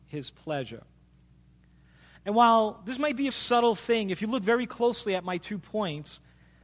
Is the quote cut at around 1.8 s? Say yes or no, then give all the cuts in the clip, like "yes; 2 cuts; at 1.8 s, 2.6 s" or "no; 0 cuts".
no; 1 cut; at 3.3 s